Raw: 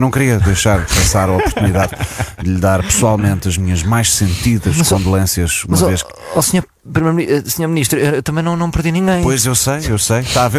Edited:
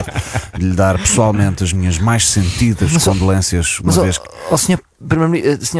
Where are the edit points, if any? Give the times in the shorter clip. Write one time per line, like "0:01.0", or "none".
none